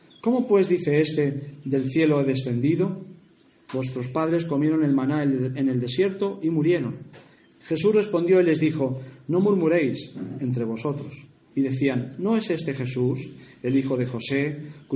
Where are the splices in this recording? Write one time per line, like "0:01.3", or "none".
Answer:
0:03.7
0:07.5
0:11.5